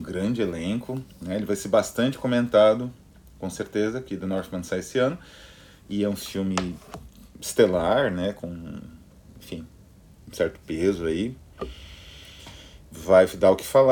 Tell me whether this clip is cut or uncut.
uncut